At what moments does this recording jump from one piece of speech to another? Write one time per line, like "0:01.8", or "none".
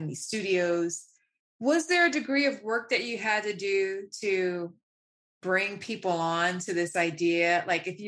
none